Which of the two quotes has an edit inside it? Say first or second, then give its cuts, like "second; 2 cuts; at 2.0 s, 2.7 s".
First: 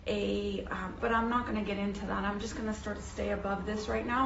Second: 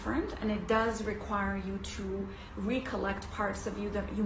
first; 1 cut; at 1.0 s